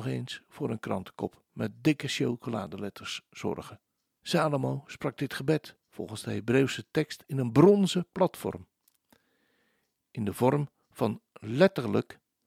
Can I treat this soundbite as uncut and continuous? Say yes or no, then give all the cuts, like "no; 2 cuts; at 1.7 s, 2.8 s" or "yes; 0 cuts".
no; 2 cuts; at 4.2 s, 5.8 s